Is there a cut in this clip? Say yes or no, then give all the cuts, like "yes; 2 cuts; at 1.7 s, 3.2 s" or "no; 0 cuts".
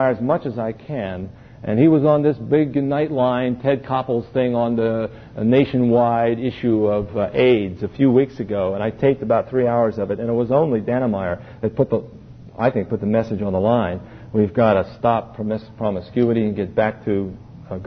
no; 0 cuts